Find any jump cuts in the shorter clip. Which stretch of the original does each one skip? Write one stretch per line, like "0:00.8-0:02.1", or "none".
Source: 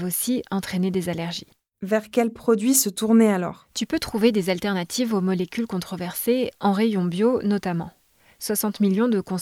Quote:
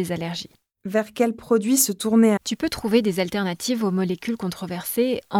0:03.3-0:03.7